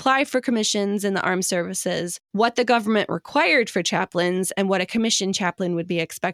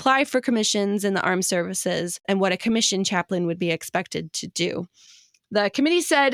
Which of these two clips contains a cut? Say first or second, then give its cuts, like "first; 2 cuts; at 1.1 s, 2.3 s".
second; 1 cut; at 2.2 s